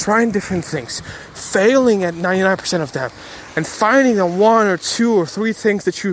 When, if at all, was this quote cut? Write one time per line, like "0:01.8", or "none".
none